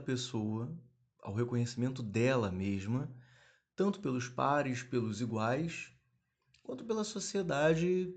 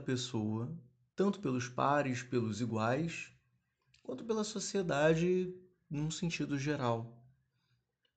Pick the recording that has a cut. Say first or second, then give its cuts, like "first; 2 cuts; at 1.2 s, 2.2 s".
second; 1 cut; at 1.1 s